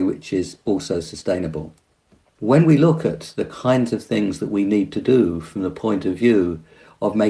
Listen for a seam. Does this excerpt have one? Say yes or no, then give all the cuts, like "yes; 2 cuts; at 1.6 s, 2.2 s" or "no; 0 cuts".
no; 0 cuts